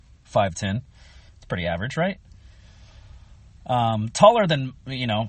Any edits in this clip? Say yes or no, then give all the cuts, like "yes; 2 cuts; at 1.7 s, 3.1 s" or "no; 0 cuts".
yes; 1 cut; at 1.3 s